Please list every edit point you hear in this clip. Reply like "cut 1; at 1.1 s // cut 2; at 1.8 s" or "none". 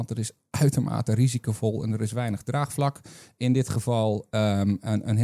none